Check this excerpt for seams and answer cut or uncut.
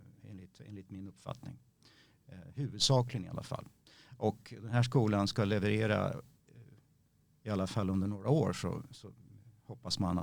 uncut